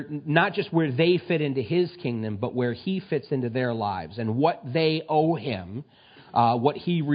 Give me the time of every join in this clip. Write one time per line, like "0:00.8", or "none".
none